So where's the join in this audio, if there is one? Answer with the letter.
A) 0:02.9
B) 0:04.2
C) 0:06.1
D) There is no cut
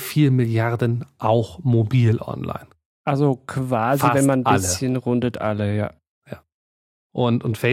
D